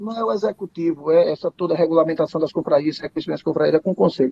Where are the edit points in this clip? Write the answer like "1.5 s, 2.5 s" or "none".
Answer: 1.2 s

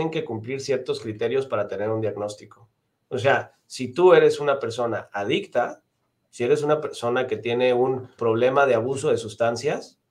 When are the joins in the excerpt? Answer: 8.2 s

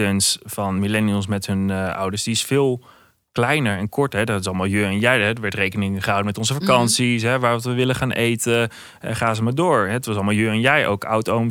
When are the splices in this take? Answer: none

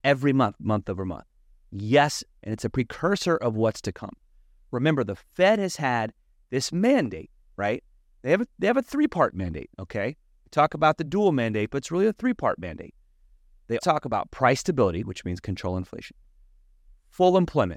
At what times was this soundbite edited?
2.4 s, 13.8 s

